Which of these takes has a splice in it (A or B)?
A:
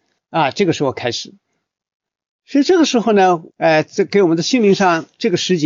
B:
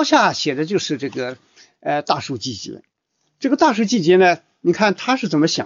A